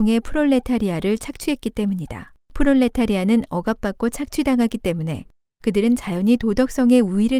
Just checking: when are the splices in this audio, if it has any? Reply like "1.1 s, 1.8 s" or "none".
2.4 s